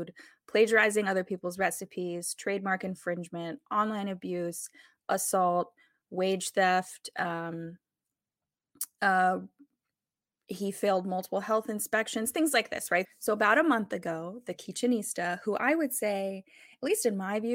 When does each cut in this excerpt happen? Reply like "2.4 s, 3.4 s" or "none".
13.0 s